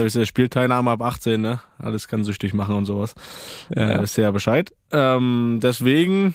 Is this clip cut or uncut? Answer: uncut